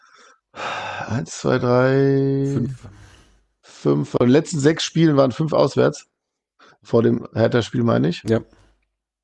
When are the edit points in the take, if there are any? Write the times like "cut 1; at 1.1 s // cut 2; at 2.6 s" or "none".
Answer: none